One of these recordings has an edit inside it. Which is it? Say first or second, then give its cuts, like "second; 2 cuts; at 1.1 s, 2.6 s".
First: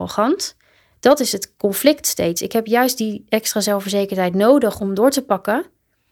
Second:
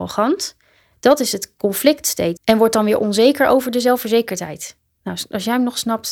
second; 1 cut; at 2.4 s